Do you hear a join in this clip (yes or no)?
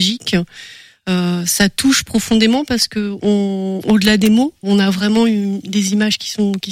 yes